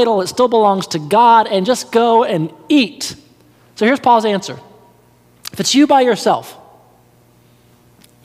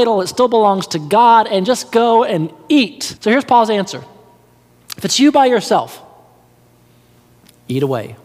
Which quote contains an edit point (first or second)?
second